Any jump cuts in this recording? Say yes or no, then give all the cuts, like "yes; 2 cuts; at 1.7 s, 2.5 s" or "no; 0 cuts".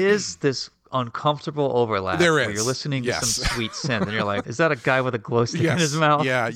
yes; 1 cut; at 4.4 s